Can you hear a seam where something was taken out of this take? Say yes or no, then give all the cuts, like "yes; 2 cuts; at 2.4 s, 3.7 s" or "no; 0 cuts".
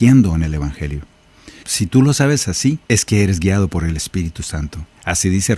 yes; 2 cuts; at 1.6 s, 2.8 s